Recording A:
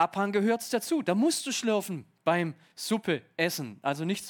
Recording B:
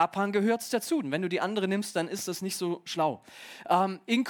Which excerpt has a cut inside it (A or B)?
B